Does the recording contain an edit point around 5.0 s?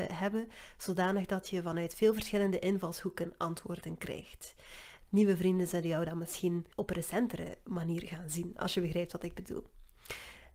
yes; 2 cuts; at 5.0 s, 6.7 s

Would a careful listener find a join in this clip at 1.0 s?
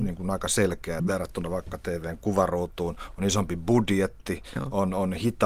yes; 1 cut; at 1.0 s

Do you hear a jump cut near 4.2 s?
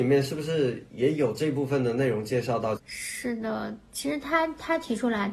no; 1 cut; at 2.8 s

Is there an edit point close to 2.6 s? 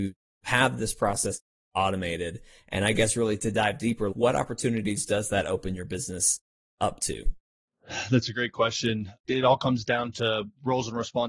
no; 2 cuts; at 4.1 s, 9.2 s

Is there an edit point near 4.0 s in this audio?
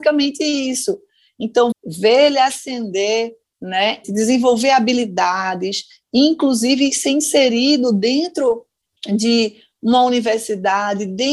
yes; 2 cuts; at 1.7 s, 4.0 s

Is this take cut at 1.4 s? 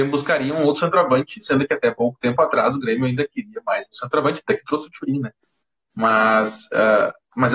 no; 0 cuts

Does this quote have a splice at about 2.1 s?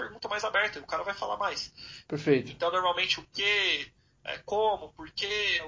yes; 1 cut; at 2.1 s

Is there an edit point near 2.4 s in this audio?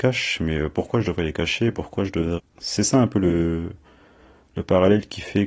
yes; 1 cut; at 2.4 s

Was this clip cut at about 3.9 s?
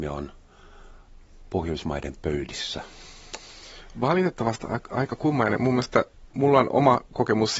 no; 1 cut; at 6.3 s

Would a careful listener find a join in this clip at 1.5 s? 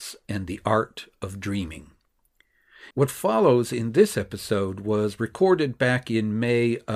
no; 1 cut; at 2.9 s

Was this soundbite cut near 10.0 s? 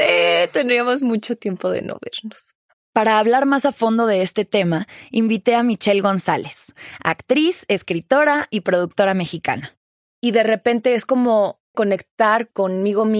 yes; 3 cuts; at 2.7 s, 10.0 s, 11.7 s

